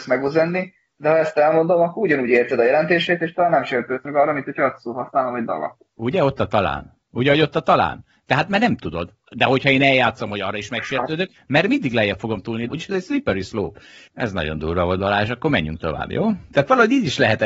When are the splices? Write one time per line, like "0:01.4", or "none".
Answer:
0:12.7
0:14.1